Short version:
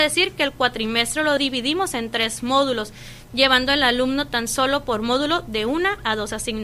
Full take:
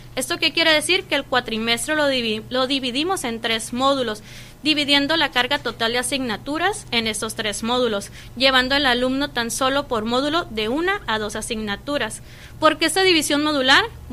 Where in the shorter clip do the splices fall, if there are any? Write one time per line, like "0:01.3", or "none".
0:01.4
0:03.3